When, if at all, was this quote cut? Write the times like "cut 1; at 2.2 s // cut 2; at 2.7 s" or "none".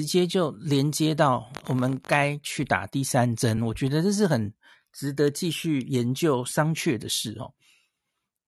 none